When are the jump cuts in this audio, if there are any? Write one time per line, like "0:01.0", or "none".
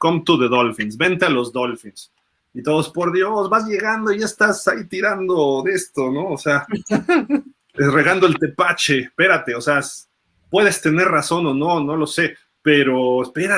none